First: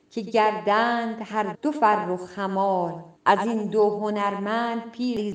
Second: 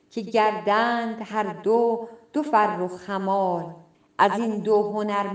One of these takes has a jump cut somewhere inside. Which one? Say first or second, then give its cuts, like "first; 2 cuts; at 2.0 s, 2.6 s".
first; 2 cuts; at 1.5 s, 3.2 s